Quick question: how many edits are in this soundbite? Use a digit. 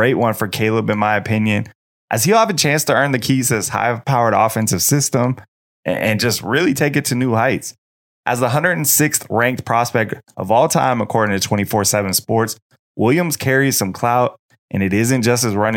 0